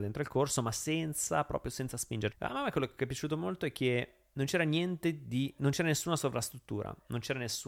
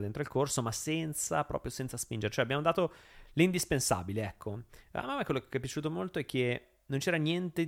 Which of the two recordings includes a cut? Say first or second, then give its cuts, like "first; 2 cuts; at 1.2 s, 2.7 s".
first; 1 cut; at 2.3 s